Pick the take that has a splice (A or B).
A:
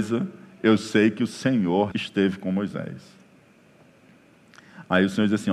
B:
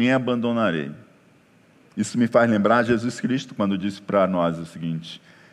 A